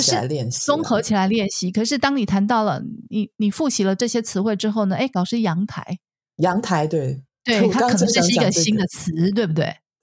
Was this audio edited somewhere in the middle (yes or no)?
yes